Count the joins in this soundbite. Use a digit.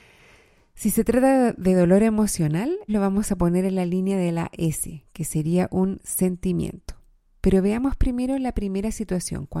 1